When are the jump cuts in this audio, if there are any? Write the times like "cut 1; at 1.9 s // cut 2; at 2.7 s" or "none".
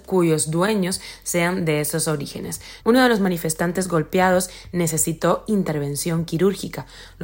cut 1; at 2.8 s